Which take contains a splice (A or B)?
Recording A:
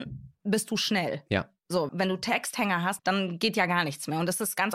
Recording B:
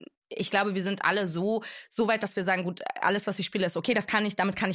A